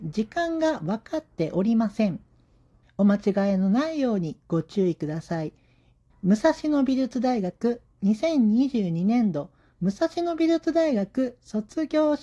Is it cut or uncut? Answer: cut